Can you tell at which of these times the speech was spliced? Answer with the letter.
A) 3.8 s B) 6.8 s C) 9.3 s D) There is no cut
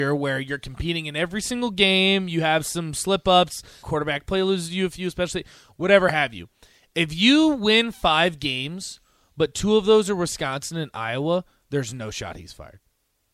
A